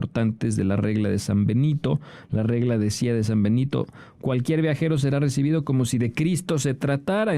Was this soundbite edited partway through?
no; 0 cuts

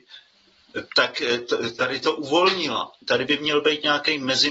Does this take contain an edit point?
yes; 1 cut; at 3.0 s

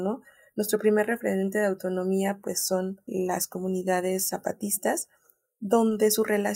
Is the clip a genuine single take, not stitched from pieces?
yes; 0 cuts

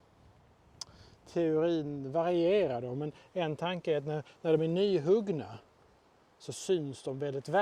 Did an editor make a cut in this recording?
no; 0 cuts

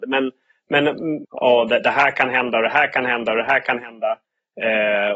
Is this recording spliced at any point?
yes; 1 cut; at 1.2 s

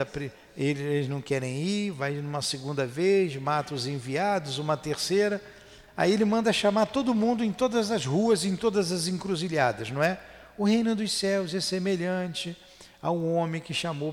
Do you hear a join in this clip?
no; 0 cuts

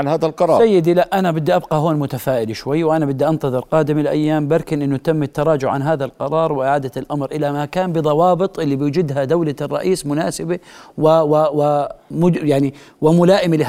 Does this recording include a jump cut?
no; 0 cuts

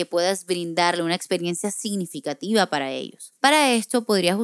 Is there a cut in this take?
yes; 1 cut; at 3.4 s

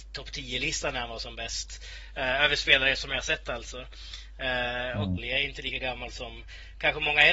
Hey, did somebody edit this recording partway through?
yes; 1 cut; at 5.2 s

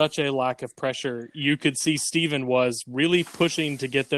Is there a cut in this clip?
no; 0 cuts

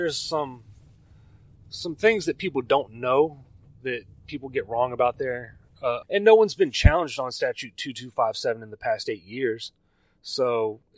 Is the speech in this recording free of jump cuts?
no; 1 cut; at 6.0 s

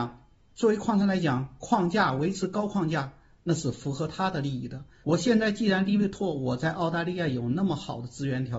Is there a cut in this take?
yes; 1 cut; at 5.0 s

